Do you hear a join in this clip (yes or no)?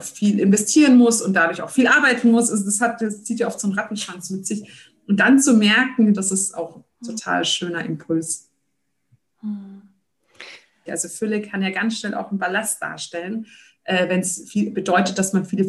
yes